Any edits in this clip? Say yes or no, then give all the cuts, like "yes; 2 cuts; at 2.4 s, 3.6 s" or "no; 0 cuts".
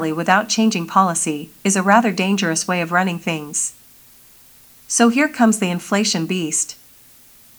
no; 0 cuts